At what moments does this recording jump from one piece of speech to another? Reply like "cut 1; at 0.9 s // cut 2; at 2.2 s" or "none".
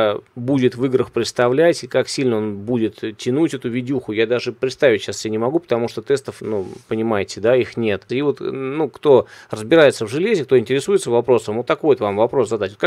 cut 1; at 8.1 s